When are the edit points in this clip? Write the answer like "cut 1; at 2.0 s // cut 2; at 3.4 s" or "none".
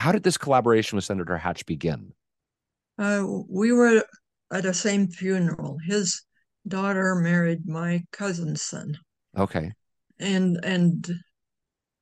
none